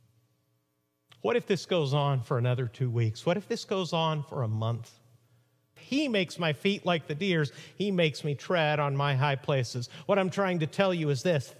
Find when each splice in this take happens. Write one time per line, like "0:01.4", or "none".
0:05.8